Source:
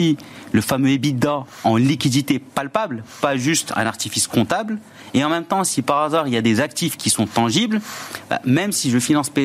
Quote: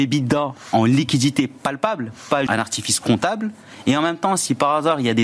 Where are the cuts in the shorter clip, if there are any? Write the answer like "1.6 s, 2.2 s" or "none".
2.5 s